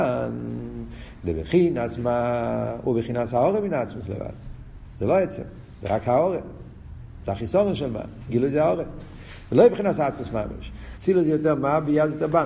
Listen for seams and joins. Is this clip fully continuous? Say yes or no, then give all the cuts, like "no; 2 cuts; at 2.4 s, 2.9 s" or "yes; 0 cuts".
no; 2 cuts; at 8.3 s, 11.0 s